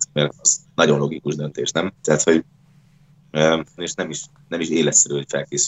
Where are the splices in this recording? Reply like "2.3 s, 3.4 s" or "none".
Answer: 2.0 s, 3.8 s